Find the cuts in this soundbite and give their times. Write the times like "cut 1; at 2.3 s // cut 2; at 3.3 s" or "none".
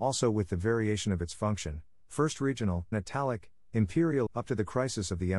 cut 1; at 2.9 s // cut 2; at 4.3 s

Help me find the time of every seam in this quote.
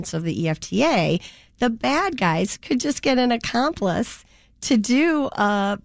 none

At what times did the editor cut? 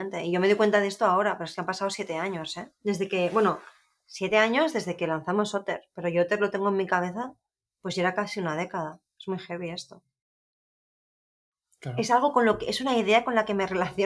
cut 1; at 2.8 s

